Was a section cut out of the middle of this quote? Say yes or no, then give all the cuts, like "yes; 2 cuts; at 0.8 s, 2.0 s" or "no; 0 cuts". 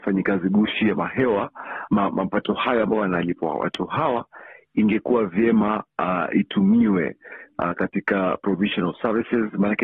no; 0 cuts